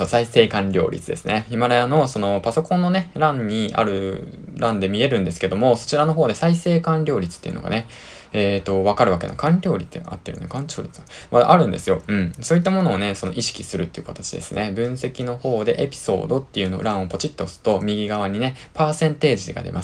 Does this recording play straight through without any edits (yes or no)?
yes